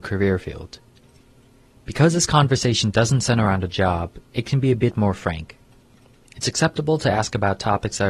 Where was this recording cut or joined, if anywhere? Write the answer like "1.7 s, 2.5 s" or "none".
none

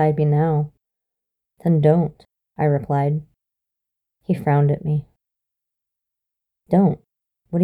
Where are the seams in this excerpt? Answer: 1.5 s

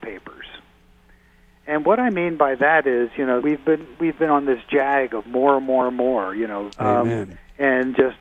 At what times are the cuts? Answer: 3.4 s, 6.7 s

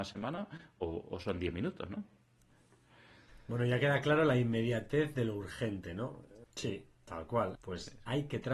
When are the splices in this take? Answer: 6.4 s, 7.6 s

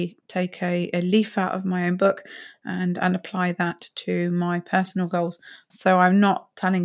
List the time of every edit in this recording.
5.7 s

